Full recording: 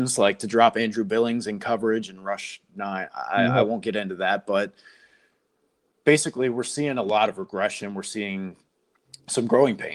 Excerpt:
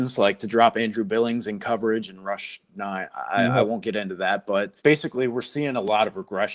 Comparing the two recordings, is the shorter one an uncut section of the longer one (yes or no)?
no